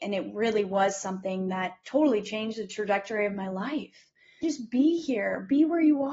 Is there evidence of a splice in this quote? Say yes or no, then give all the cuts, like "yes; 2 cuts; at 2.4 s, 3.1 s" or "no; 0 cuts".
yes; 1 cut; at 4.4 s